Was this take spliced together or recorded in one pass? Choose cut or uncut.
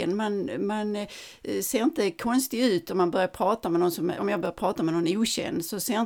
cut